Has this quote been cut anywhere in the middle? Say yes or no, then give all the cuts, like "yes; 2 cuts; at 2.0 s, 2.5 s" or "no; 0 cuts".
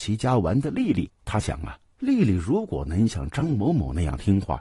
no; 0 cuts